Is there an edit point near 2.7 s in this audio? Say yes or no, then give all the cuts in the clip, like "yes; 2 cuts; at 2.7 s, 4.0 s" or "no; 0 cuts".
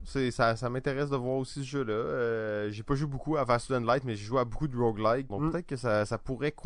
no; 1 cut; at 5.3 s